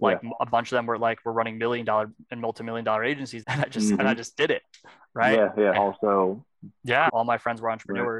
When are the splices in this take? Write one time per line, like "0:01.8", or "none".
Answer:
0:03.4
0:05.7
0:07.1